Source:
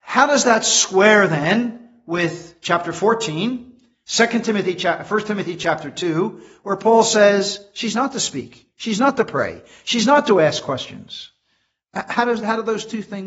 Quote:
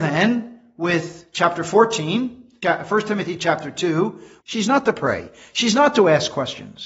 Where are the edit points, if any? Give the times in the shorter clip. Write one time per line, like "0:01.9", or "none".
0:02.6
0:04.4